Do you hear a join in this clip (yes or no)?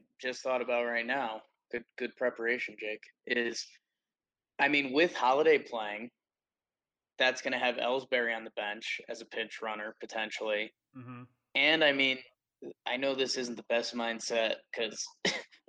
no